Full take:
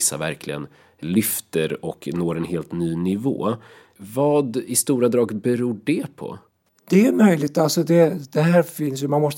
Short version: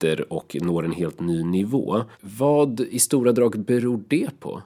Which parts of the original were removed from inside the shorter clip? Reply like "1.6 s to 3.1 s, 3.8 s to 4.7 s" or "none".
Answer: 3.7 s to 3.9 s